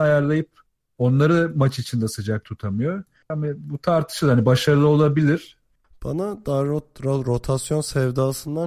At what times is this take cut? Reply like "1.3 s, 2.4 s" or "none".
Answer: 3.3 s, 5.8 s